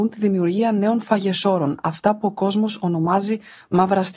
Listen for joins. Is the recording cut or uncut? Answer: uncut